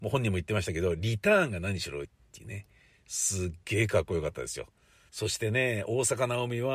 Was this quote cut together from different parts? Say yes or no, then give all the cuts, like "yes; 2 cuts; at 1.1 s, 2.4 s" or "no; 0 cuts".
yes; 2 cuts; at 2.0 s, 5.1 s